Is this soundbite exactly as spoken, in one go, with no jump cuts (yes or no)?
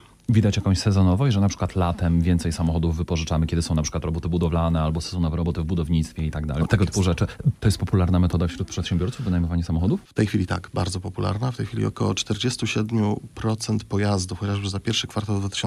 no